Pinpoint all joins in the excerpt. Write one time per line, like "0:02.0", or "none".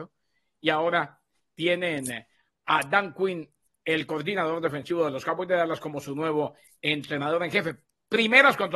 none